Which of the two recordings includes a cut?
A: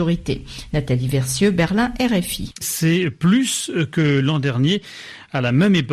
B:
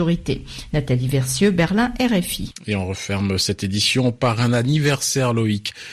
A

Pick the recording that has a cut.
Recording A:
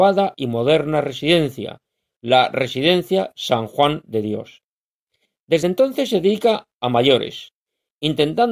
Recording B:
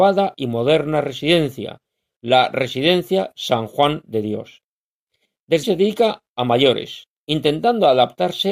B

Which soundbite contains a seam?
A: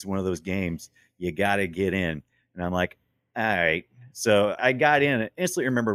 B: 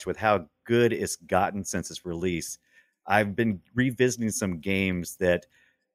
A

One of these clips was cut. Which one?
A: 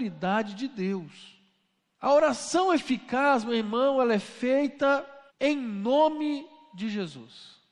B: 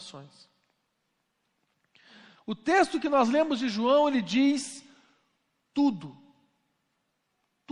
A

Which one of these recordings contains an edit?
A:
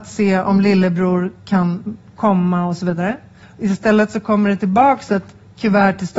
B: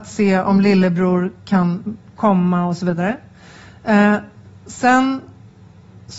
A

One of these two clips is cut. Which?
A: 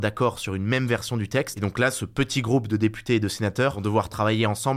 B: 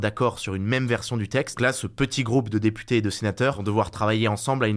B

